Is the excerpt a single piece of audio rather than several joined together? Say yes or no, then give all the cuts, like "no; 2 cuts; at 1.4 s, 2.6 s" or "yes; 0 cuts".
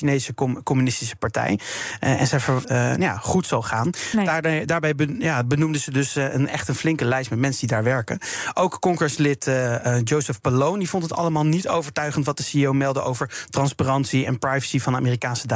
no; 1 cut; at 2.6 s